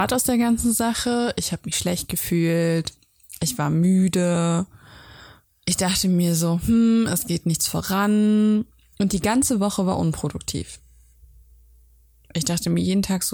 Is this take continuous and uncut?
yes; 0 cuts

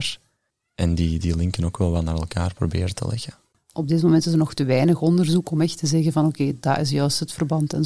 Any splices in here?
yes; 1 cut; at 3.5 s

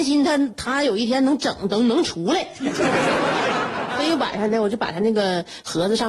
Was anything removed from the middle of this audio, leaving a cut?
no; 0 cuts

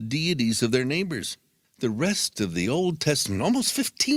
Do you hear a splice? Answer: yes; 1 cut; at 1.6 s

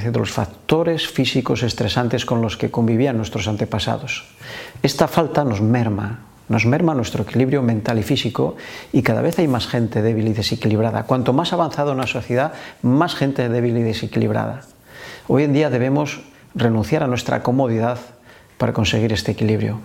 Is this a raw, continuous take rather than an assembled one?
yes; 0 cuts

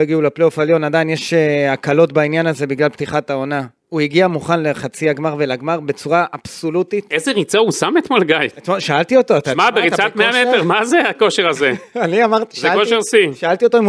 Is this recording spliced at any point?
no; 0 cuts

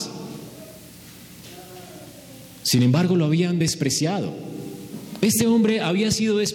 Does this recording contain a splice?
no; 0 cuts

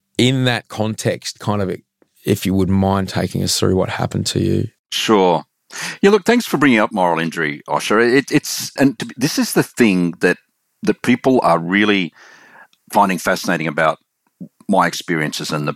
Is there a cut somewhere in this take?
yes; 1 cut; at 8.8 s

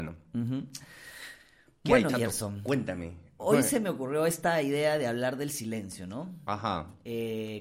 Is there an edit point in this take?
no; 0 cuts

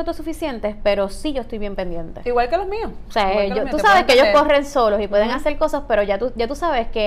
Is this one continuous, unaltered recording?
yes; 0 cuts

